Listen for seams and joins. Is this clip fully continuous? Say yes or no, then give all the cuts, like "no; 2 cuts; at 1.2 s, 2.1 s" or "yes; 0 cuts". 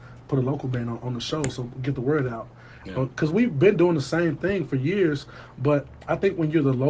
no; 1 cut; at 2.8 s